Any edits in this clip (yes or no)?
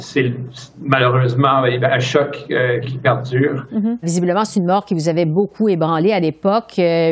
yes